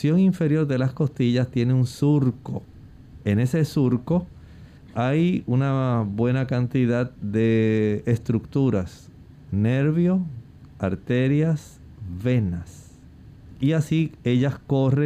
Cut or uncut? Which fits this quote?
uncut